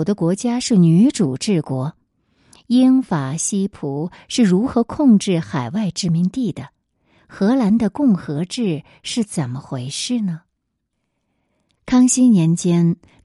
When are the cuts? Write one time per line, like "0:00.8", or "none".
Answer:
none